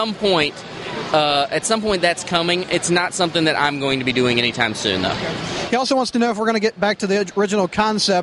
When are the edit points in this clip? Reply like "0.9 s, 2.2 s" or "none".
none

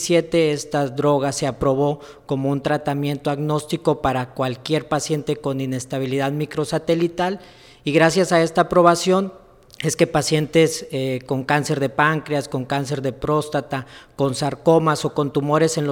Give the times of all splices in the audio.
none

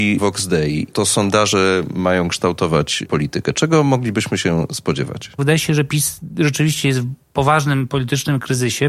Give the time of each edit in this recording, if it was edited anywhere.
5.4 s

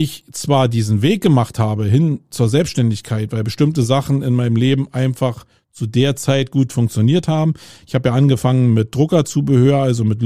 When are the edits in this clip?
none

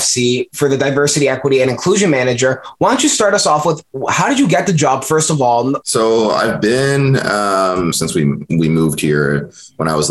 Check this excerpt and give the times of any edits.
5.8 s, 7.9 s

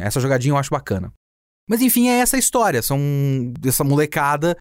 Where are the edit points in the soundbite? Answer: none

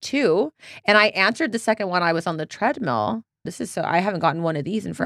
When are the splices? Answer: 3.4 s

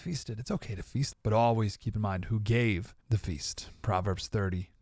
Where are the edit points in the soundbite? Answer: 1.1 s, 3.0 s

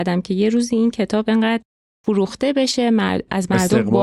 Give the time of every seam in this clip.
none

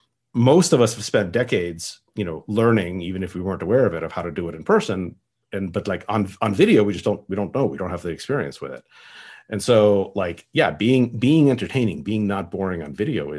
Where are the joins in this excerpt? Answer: none

